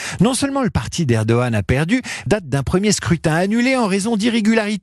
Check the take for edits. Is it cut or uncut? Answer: cut